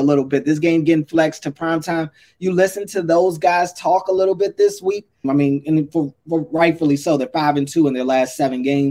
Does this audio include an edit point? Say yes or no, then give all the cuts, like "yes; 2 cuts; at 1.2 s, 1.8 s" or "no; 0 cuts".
yes; 1 cut; at 5.2 s